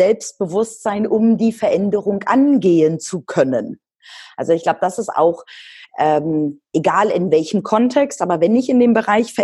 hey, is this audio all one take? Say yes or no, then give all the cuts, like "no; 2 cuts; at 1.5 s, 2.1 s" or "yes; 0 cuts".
yes; 0 cuts